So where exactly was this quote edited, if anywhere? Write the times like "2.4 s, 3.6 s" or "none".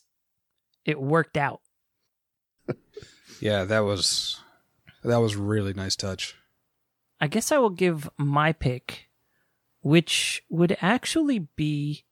2.6 s